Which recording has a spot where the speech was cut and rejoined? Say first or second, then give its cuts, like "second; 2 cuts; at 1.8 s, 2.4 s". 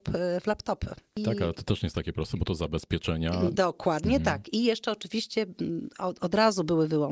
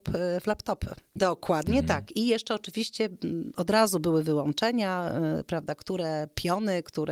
second; 2 cuts; at 1.2 s, 3.5 s